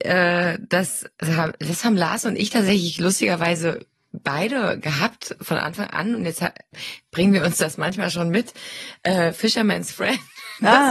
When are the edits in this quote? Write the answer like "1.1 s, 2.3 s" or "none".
1.1 s